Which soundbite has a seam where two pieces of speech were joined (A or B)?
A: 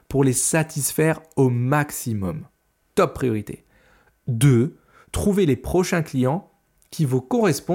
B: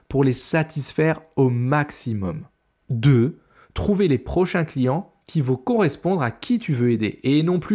B